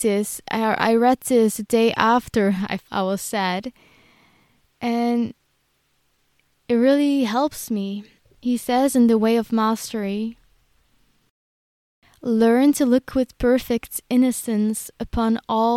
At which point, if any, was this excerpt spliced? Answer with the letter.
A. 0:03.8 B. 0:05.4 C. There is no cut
C